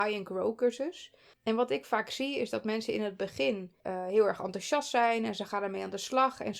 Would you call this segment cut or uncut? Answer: cut